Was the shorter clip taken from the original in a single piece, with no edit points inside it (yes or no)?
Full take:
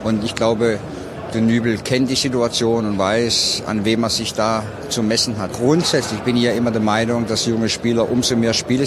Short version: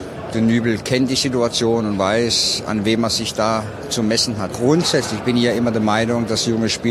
yes